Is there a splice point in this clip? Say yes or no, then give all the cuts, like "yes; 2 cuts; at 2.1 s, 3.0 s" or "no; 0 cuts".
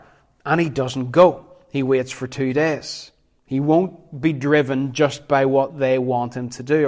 no; 0 cuts